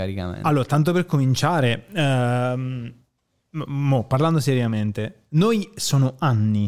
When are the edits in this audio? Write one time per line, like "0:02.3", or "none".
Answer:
none